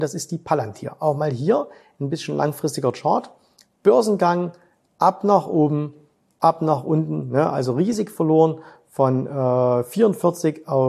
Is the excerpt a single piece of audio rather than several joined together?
yes; 0 cuts

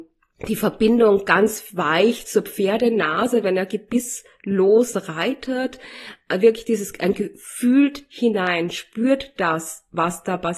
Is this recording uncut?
yes; 0 cuts

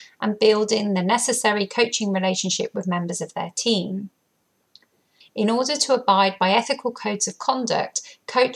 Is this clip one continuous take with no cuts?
no; 1 cut; at 5.2 s

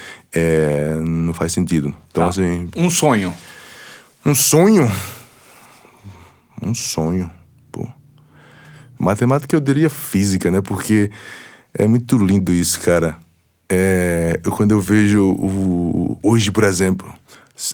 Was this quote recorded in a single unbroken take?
no; 1 cut; at 9.0 s

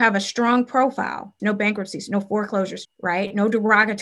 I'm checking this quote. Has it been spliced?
yes; 2 cuts; at 1.4 s, 2.8 s

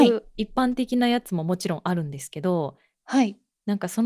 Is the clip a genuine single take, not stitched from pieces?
yes; 0 cuts

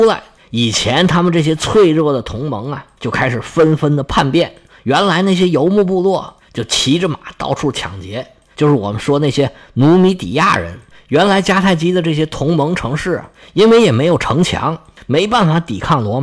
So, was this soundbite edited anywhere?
no; 0 cuts

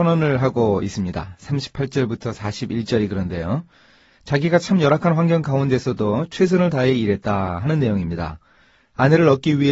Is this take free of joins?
yes; 0 cuts

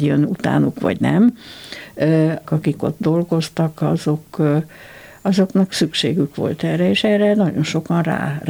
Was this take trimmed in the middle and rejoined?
yes; 1 cut; at 2.4 s

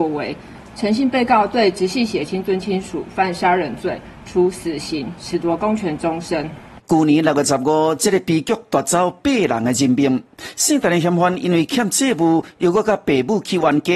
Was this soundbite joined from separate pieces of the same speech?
yes; 1 cut; at 6.8 s

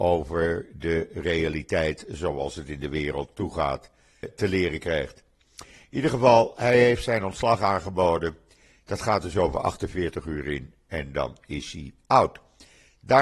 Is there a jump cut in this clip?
yes; 1 cut; at 4.2 s

